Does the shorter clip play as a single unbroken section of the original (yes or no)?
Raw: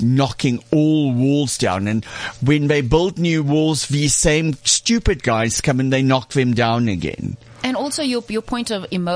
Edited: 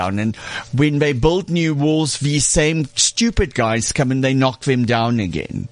yes